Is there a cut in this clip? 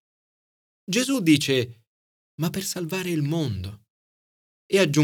yes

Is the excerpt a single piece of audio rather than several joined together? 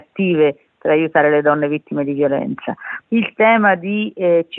no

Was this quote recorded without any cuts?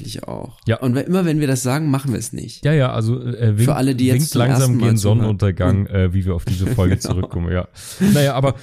yes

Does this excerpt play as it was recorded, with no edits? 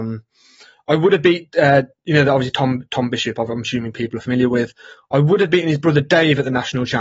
yes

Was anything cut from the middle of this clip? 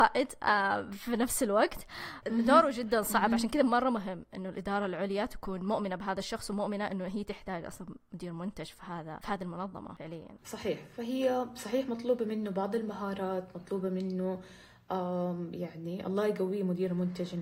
no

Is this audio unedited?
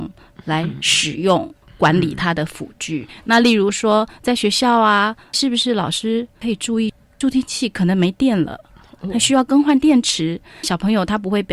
yes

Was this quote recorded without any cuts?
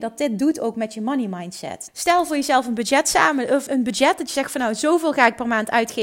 no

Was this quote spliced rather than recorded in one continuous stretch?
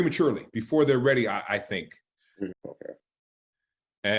yes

